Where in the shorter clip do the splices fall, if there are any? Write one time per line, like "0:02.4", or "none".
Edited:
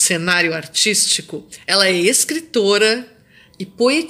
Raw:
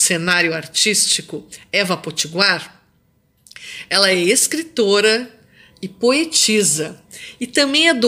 0:01.6